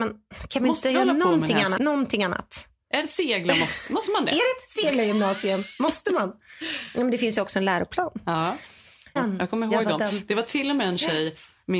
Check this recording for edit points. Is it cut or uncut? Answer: cut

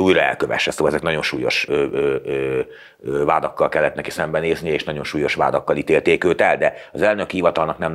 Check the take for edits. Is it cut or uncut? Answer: cut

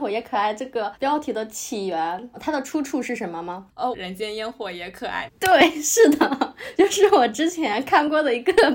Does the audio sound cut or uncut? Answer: cut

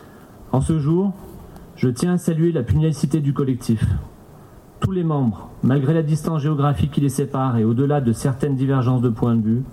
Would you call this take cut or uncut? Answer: uncut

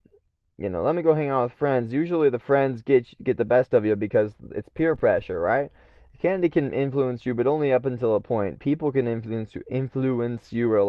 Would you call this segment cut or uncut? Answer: uncut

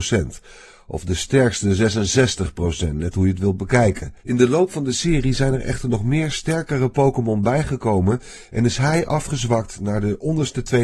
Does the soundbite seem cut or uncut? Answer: cut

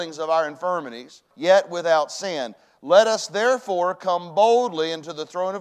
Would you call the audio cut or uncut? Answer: cut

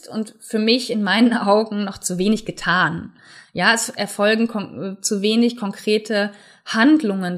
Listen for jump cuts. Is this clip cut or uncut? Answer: uncut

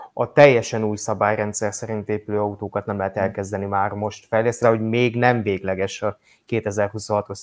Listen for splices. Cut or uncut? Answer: cut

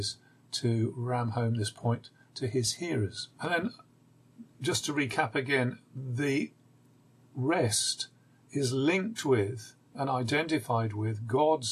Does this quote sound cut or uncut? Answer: cut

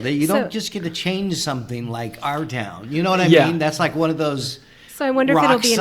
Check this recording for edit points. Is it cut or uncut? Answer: uncut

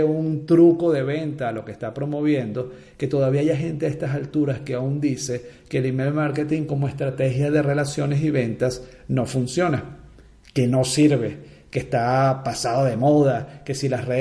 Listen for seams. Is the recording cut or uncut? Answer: uncut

